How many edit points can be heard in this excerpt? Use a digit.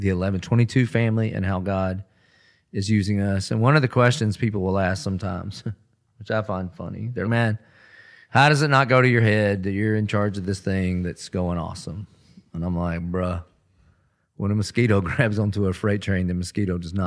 1